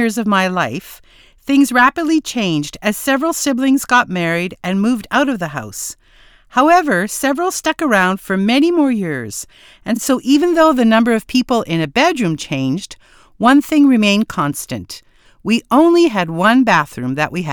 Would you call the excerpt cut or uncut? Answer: uncut